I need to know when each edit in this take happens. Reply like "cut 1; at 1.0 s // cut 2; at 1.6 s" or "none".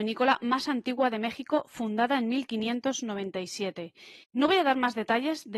cut 1; at 4.2 s